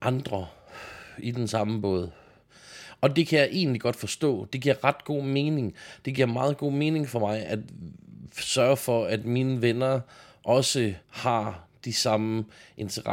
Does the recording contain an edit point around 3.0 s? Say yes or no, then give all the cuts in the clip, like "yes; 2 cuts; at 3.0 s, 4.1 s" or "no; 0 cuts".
no; 1 cut; at 11.0 s